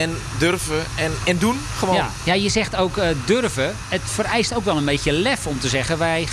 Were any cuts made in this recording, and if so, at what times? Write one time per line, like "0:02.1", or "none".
0:01.2